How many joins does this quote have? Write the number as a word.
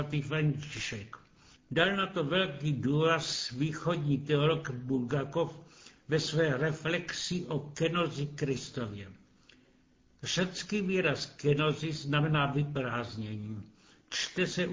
one